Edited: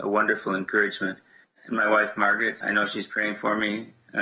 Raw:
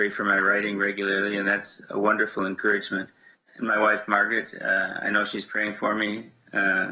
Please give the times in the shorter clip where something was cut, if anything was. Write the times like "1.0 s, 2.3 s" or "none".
2.6 s